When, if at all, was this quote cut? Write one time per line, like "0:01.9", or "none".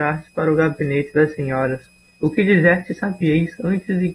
0:02.1